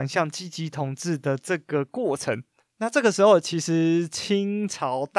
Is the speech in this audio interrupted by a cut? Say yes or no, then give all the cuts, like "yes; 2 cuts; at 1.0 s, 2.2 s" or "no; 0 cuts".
no; 0 cuts